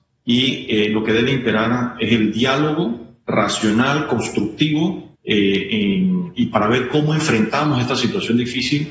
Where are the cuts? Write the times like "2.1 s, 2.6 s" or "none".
5.1 s

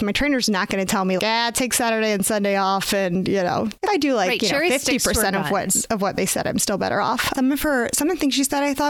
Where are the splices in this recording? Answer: 1.2 s, 3.8 s, 7.3 s

